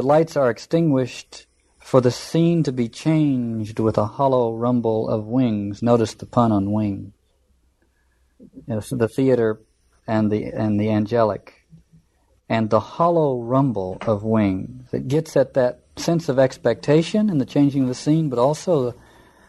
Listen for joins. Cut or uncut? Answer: uncut